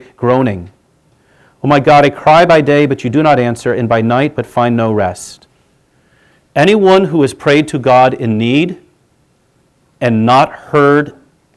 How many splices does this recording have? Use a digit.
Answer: 0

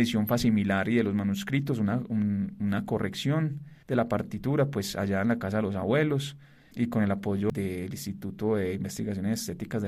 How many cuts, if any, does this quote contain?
1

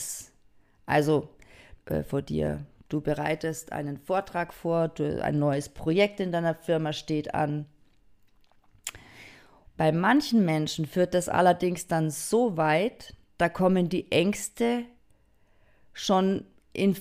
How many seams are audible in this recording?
2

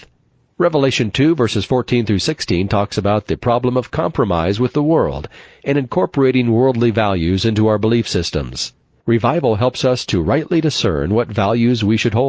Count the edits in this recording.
0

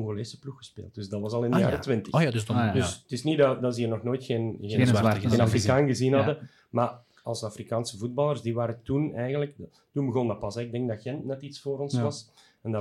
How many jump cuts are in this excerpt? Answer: 0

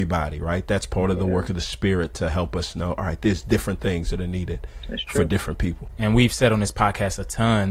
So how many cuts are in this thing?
1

